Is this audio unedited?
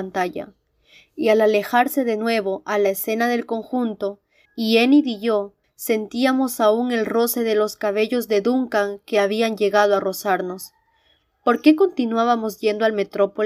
no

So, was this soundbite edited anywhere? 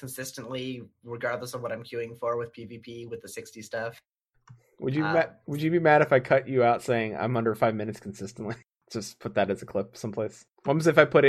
no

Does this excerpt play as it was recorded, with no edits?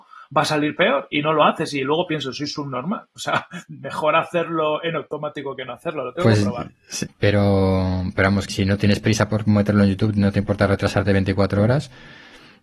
no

